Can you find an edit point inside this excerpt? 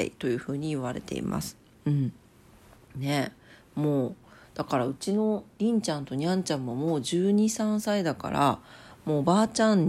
yes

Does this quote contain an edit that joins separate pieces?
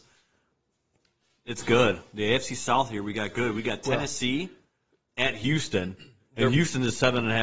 no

